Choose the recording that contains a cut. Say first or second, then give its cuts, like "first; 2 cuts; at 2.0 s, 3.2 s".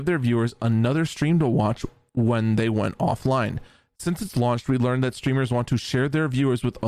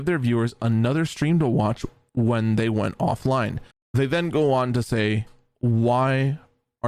second; 1 cut; at 3.7 s